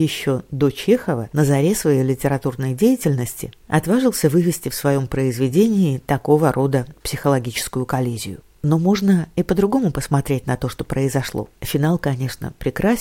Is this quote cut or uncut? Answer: cut